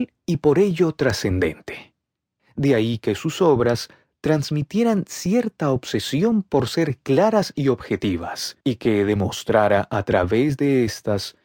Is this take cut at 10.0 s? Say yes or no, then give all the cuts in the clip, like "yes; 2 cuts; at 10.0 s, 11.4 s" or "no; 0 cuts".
no; 2 cuts; at 2.4 s, 8.6 s